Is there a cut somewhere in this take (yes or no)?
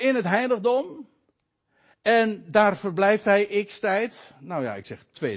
no